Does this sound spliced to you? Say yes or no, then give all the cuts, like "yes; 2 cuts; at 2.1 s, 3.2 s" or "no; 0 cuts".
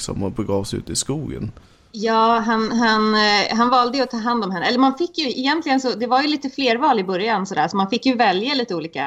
no; 0 cuts